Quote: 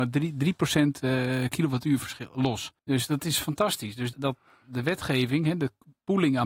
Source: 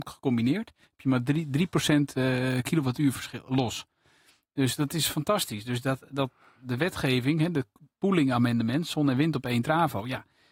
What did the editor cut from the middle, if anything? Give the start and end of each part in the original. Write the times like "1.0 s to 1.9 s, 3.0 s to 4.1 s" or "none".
3.9 s to 4.5 s, 5.8 s to 6.1 s